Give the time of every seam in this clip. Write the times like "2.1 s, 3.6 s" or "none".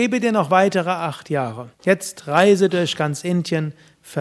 1.7 s